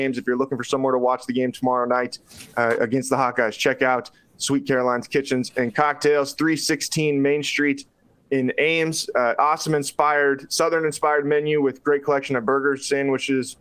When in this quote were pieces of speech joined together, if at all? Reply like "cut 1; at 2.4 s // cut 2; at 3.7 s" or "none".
none